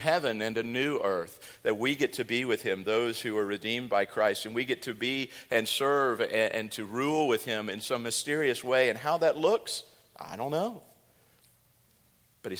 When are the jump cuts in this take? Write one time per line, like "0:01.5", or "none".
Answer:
none